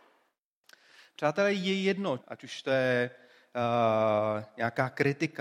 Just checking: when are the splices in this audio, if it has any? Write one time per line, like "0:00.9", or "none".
0:02.2